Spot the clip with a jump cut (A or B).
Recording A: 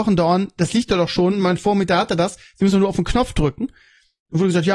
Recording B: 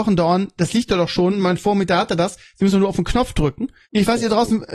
B